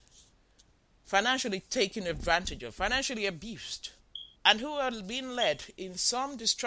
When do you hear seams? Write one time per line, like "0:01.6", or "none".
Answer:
0:04.4